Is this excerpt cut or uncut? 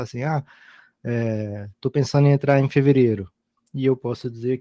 uncut